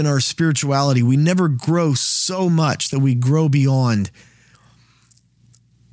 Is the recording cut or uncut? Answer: uncut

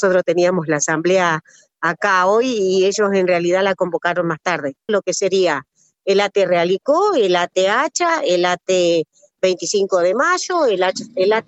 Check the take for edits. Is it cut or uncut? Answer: cut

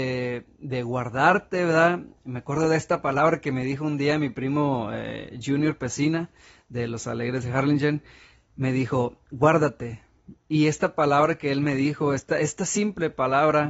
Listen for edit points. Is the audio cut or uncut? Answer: uncut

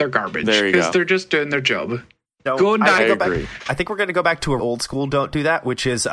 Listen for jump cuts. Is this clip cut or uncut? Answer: cut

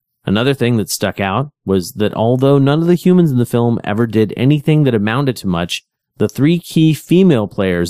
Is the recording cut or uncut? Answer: uncut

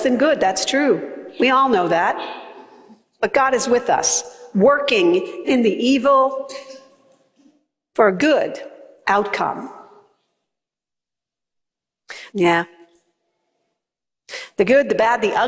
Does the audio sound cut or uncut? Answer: cut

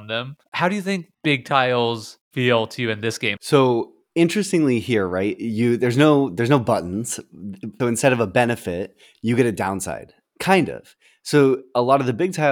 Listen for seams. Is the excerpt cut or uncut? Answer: cut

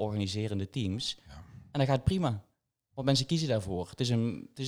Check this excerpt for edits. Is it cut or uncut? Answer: uncut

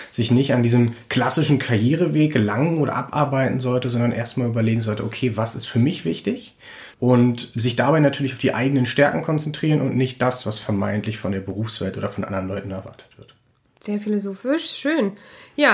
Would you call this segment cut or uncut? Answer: cut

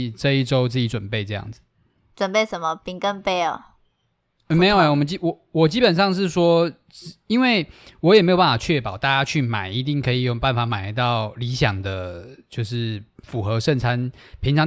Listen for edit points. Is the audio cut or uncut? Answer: uncut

